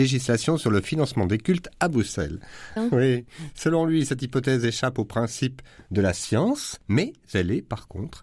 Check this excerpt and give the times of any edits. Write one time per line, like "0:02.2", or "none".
0:02.8